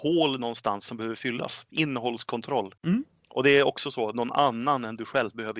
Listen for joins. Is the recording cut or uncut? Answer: cut